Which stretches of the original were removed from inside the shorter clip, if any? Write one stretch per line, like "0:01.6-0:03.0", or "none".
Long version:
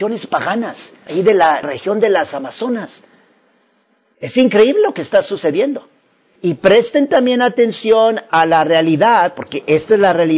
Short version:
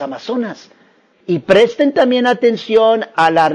0:03.4-0:06.3